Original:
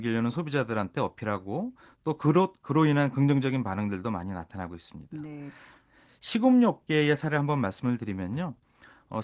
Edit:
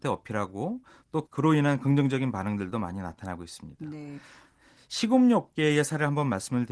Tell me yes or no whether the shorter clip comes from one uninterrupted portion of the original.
no